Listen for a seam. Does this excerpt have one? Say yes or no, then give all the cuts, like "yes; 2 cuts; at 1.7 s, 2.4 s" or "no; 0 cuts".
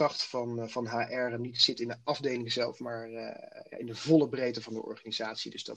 no; 0 cuts